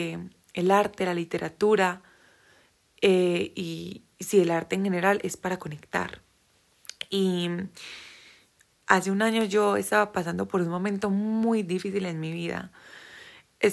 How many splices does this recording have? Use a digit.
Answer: 0